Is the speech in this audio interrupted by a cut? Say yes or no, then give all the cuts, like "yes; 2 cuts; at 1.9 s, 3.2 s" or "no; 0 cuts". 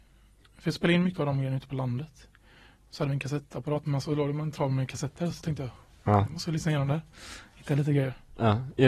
no; 0 cuts